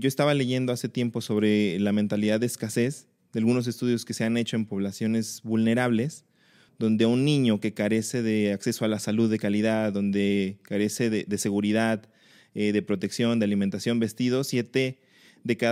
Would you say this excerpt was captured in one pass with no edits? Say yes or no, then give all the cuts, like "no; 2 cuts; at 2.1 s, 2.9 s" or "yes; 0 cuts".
yes; 0 cuts